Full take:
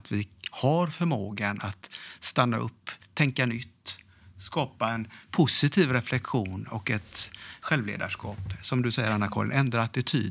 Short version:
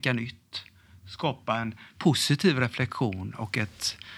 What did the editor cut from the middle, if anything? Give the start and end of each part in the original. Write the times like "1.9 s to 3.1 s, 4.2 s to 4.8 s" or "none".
none